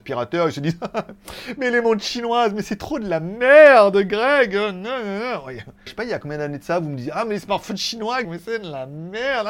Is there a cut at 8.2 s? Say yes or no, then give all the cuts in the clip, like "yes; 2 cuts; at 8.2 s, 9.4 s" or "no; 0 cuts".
yes; 2 cuts; at 5.9 s, 8.2 s